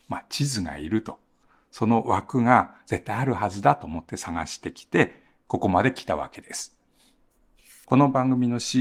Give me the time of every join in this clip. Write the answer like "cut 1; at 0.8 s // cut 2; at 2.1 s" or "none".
none